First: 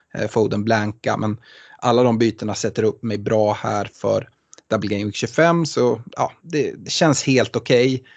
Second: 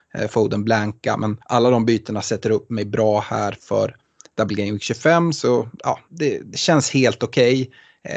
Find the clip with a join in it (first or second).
second